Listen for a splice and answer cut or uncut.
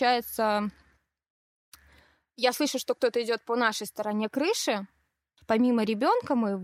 cut